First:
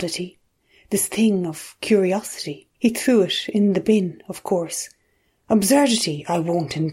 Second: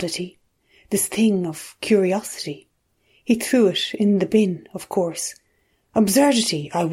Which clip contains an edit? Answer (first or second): first